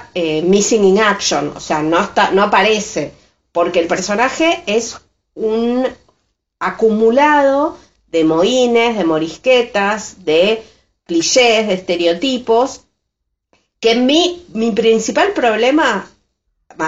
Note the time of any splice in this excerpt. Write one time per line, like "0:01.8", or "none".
none